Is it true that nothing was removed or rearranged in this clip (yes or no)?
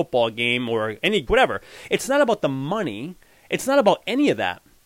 no